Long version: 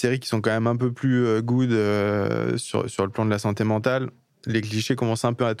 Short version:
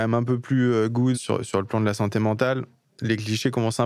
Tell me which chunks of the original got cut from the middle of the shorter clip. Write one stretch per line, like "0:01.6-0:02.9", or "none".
0:01.7-0:02.6